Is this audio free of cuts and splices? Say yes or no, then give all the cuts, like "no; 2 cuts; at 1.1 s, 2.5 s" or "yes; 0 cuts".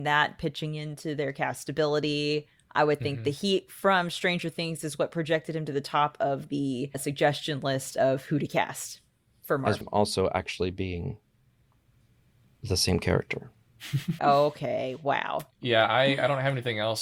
no; 3 cuts; at 9.8 s, 14.2 s, 15.5 s